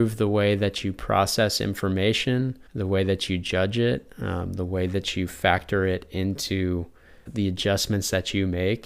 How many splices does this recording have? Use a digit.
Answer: 2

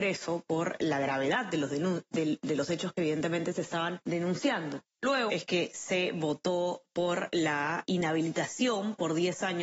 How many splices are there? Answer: 1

